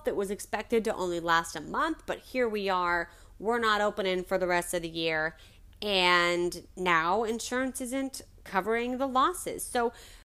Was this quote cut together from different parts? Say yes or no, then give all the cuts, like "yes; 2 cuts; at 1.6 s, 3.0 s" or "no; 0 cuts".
no; 0 cuts